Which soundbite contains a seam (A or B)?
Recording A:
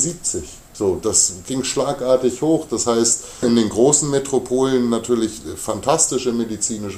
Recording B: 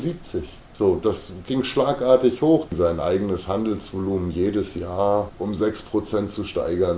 B